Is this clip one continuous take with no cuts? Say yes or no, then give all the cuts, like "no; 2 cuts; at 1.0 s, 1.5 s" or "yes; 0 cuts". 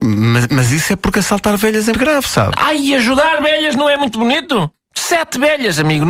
no; 1 cut; at 1.9 s